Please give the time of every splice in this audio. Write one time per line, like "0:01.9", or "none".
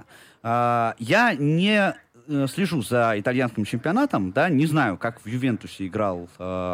none